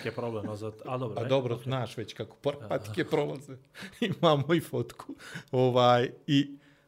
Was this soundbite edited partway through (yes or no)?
no